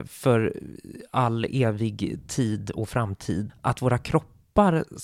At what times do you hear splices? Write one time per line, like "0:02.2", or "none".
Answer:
0:03.5